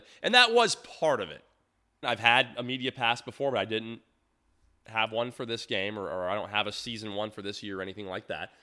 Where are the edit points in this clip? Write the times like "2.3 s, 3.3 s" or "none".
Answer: 2.0 s